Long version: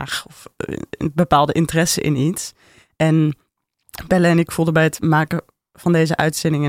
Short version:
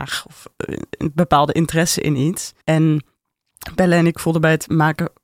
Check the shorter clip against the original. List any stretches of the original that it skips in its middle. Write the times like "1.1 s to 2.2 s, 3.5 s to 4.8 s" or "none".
2.6 s to 2.9 s

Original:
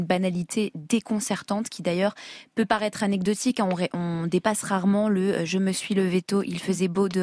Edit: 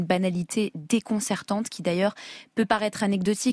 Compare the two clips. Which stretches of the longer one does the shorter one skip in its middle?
none

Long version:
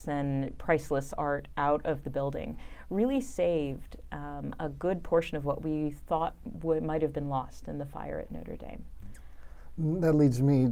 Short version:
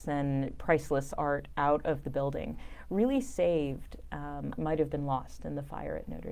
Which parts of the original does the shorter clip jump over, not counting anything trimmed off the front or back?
4.6 s to 6.8 s

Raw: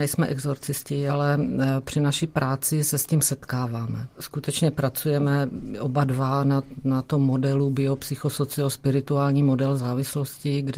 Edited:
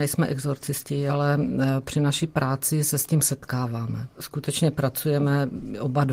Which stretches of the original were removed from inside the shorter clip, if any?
none

